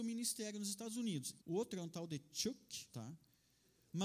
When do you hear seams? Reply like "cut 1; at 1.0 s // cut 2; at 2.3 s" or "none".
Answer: cut 1; at 1.4 s // cut 2; at 2.9 s